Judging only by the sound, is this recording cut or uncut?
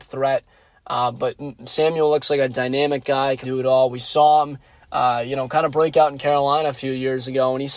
cut